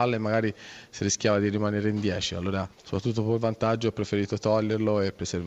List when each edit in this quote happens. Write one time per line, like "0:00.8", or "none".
0:02.7